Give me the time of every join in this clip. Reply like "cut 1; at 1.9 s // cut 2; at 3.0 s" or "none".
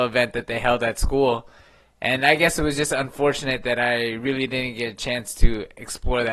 none